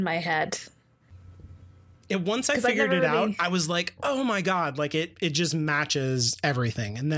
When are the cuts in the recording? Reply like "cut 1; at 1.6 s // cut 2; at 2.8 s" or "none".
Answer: none